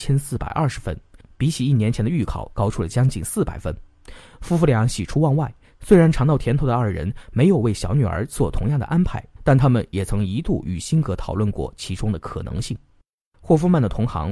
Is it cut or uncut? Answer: uncut